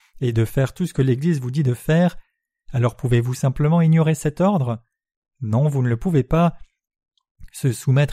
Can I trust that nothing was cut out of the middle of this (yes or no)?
yes